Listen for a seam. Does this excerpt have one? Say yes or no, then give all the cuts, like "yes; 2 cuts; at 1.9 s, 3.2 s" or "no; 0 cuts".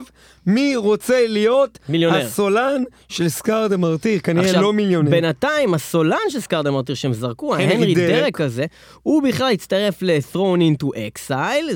no; 0 cuts